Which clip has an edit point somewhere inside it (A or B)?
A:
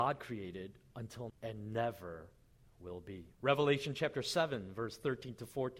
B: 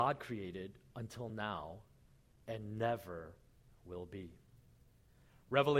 A